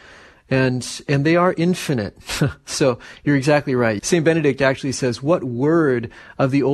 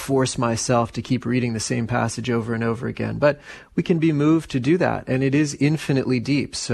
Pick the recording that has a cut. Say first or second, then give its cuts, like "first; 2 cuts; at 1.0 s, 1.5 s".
first; 1 cut; at 4.0 s